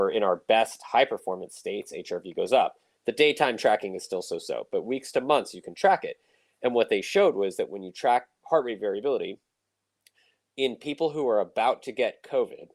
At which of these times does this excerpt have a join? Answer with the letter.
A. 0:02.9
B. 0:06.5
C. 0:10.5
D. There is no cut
A